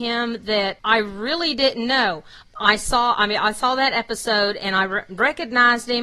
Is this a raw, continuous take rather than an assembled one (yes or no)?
no